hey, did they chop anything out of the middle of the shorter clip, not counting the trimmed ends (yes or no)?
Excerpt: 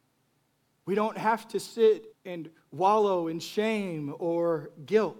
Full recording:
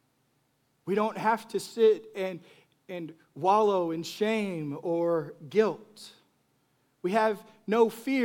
yes